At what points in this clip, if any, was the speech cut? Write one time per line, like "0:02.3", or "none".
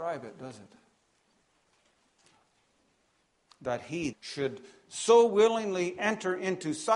0:04.1